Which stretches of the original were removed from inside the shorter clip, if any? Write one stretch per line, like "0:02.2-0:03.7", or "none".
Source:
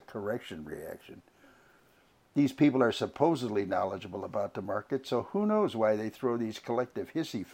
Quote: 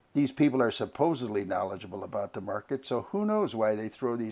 none